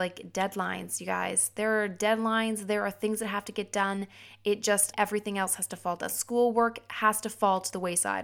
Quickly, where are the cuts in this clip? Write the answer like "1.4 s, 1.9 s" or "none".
4.9 s